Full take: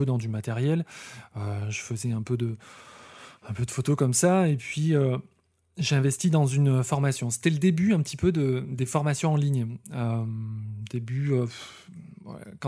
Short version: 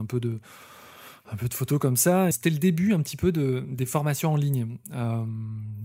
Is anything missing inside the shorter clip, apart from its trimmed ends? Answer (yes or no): yes